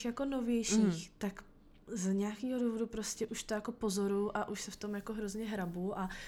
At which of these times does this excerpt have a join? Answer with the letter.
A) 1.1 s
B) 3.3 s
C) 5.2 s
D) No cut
B